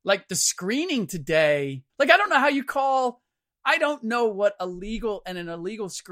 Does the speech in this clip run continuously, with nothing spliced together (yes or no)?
no